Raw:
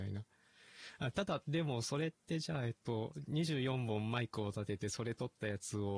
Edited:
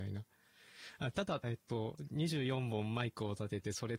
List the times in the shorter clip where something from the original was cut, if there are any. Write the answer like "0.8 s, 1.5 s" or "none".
1.4 s

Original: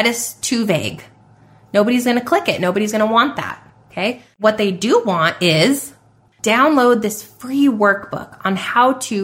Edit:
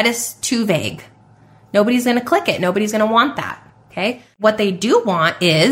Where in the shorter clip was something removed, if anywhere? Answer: none

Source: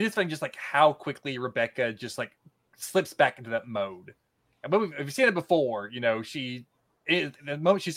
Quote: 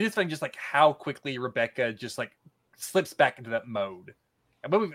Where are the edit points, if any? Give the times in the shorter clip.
none

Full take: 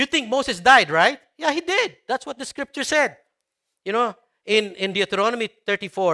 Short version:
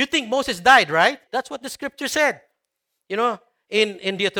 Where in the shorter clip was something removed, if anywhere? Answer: 1.3 s

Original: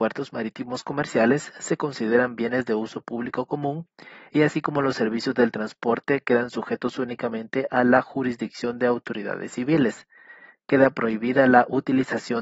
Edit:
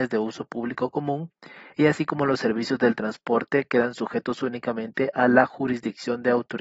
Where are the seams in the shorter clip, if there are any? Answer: none

